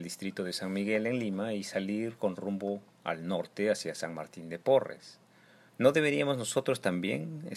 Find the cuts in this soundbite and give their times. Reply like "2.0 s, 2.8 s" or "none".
5.7 s